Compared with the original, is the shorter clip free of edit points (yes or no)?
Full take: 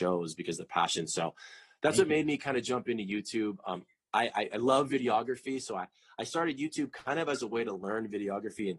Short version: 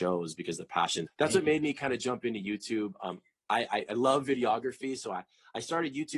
no